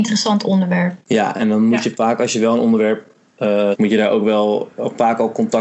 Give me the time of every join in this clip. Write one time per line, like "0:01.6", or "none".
0:01.0
0:03.7